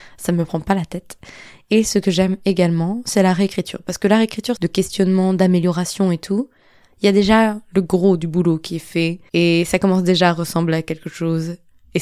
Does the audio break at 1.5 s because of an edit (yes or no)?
no